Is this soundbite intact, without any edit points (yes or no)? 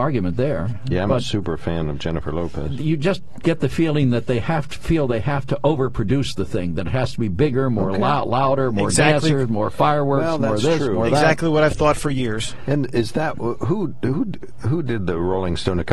yes